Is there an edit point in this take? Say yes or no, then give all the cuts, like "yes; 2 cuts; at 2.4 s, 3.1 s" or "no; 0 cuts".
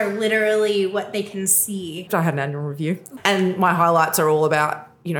yes; 1 cut; at 2.1 s